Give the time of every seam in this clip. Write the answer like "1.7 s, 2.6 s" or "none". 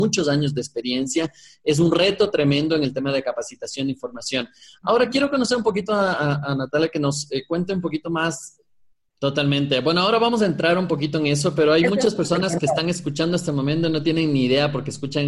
9.1 s